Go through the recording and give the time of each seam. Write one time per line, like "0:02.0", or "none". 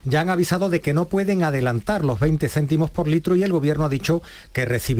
none